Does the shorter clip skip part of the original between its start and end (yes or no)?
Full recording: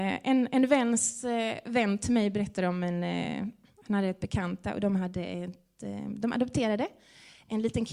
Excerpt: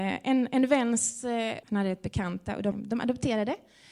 yes